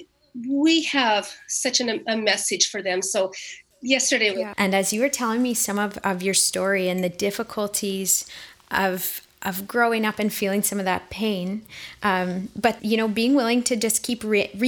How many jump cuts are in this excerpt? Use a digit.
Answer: 2